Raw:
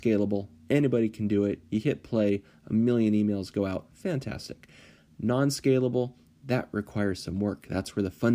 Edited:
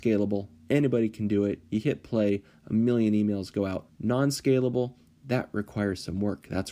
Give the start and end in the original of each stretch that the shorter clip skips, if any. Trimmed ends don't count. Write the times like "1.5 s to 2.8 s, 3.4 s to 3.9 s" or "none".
3.9 s to 5.1 s